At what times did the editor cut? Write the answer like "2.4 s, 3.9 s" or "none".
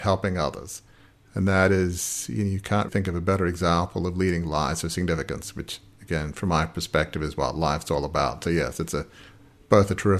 2.9 s